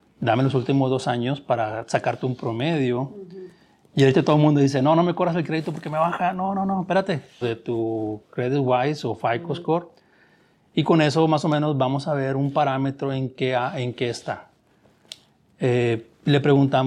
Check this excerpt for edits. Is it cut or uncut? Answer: cut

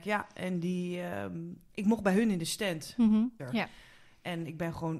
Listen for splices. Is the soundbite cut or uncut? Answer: cut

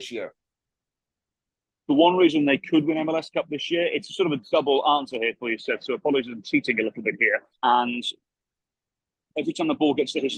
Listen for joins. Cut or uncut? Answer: cut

